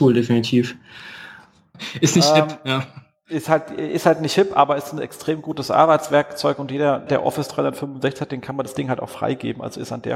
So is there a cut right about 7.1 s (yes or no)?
yes